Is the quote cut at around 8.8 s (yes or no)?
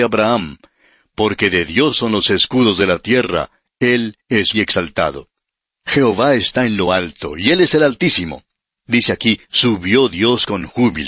no